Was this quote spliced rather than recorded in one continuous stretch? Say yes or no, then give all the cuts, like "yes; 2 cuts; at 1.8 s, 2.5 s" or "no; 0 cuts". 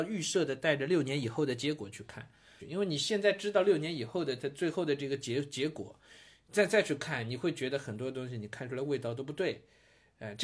yes; 1 cut; at 2.6 s